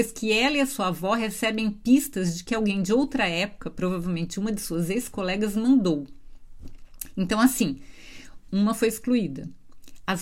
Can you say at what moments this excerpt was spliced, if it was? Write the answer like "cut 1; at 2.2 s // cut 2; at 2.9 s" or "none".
cut 1; at 8.5 s